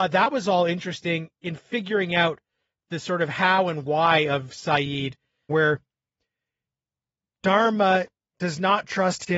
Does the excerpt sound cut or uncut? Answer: cut